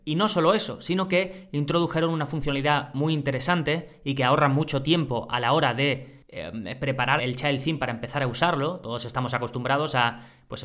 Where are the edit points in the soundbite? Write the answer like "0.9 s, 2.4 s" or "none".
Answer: 7.2 s